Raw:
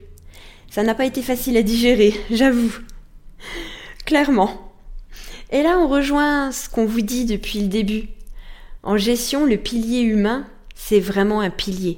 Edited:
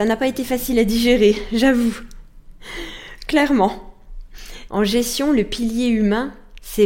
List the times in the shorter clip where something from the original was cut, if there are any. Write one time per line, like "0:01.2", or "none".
0:04.7